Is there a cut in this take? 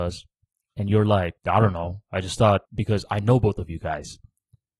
yes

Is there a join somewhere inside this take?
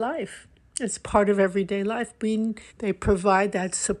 yes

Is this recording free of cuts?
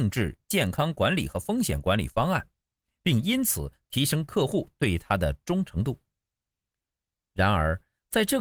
yes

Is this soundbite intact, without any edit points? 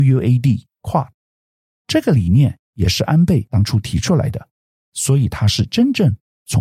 yes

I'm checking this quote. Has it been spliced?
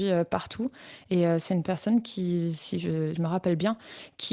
yes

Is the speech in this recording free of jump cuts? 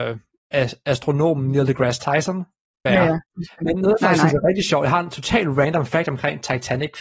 no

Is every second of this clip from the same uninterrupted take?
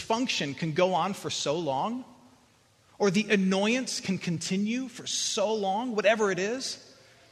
yes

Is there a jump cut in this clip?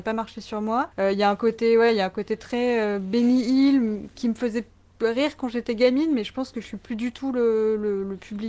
yes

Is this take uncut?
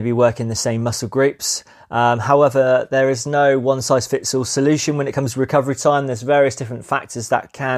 yes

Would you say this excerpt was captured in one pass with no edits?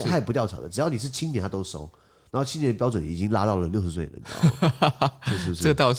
yes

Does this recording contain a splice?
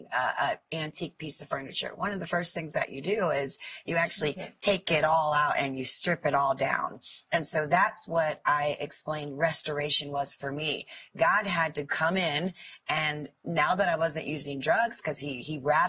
no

